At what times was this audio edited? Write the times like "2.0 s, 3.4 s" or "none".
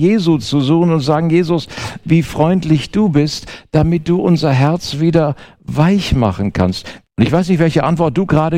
2.0 s, 7.0 s

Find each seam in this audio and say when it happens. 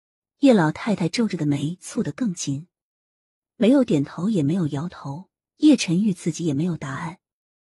none

